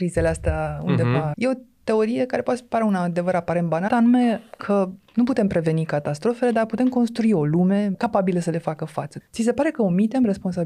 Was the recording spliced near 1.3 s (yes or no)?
yes